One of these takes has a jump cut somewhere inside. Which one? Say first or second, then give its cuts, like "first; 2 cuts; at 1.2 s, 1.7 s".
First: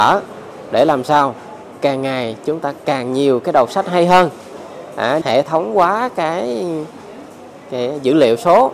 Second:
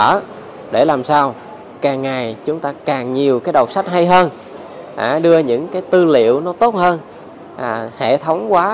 first; 1 cut; at 5.2 s